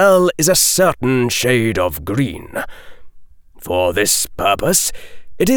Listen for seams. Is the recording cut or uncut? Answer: uncut